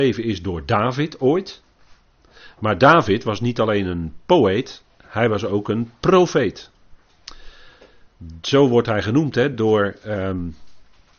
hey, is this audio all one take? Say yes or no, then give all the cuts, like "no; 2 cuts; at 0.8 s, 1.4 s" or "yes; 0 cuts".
yes; 0 cuts